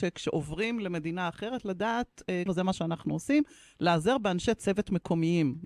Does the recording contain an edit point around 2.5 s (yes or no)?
yes